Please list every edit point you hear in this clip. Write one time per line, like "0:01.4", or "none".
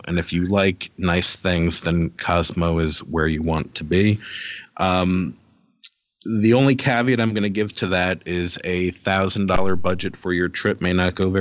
0:04.7